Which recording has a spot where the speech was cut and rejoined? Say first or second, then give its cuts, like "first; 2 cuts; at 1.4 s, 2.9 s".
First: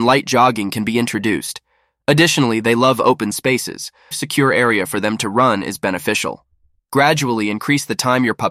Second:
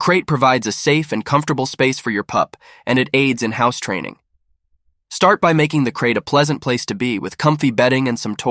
first; 2 cuts; at 4.1 s, 6.7 s